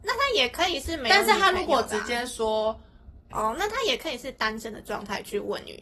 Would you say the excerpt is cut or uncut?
cut